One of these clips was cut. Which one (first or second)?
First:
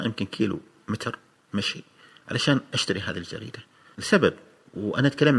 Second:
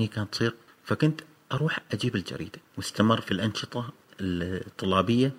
second